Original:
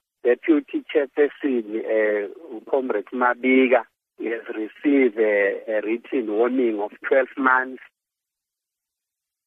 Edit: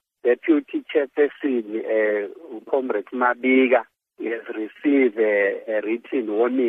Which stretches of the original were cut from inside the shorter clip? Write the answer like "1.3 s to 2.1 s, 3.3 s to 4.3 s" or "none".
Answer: none